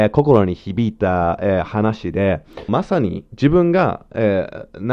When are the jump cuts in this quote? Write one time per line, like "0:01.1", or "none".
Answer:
0:02.7